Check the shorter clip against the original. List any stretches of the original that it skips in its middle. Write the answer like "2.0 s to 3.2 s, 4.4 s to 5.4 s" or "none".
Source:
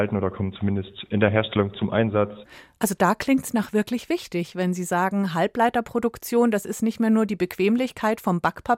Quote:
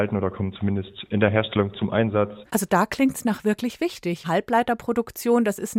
2.5 s to 2.8 s, 4.5 s to 5.3 s